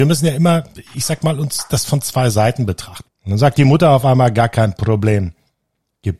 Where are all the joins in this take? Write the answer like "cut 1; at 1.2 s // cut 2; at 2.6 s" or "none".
cut 1; at 3.0 s